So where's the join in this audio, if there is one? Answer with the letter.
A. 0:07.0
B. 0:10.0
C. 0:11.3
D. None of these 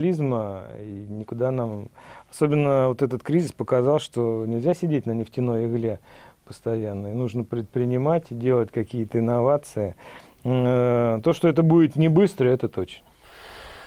D